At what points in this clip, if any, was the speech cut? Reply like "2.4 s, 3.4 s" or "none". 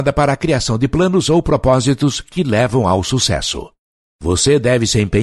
4.2 s